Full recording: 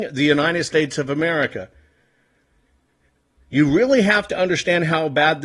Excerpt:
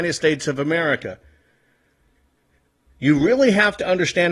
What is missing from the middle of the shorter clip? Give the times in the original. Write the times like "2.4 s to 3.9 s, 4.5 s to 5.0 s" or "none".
none